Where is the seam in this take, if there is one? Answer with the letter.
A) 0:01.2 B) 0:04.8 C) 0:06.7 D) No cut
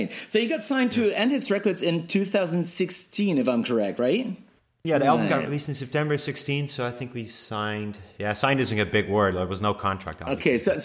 B